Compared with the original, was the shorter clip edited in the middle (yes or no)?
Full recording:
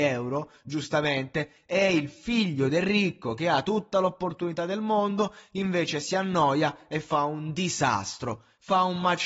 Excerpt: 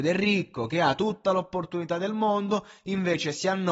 no